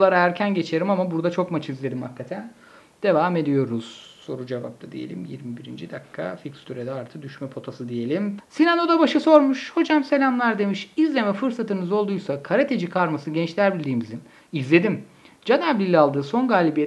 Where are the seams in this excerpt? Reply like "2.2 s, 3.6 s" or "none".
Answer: 8.4 s